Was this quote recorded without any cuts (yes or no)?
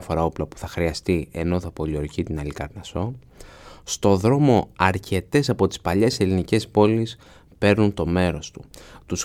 yes